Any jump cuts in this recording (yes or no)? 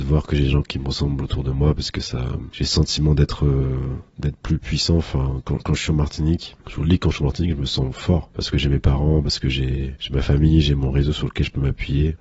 no